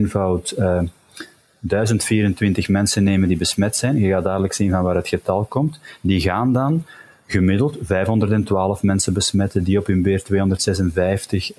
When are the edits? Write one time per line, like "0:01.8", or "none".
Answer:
none